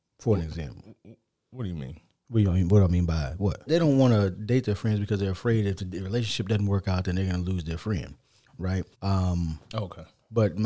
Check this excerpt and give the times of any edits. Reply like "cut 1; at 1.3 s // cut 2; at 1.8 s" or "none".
cut 1; at 3.7 s // cut 2; at 8.9 s